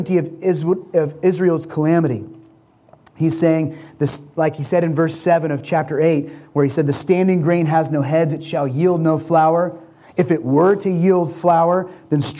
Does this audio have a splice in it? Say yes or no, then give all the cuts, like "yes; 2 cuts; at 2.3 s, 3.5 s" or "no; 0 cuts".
no; 0 cuts